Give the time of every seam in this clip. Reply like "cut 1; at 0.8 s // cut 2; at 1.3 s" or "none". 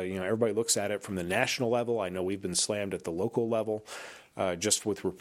none